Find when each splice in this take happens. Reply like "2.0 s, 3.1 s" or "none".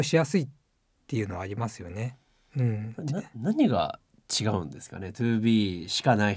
none